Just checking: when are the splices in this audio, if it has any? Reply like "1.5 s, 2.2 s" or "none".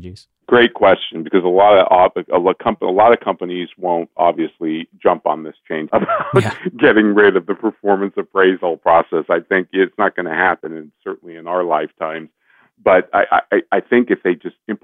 5.9 s